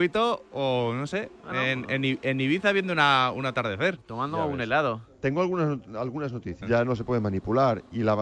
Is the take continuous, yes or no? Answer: no